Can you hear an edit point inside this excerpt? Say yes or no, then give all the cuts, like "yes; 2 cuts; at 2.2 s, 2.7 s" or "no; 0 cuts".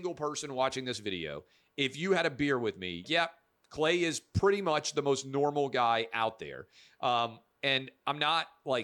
yes; 1 cut; at 3.0 s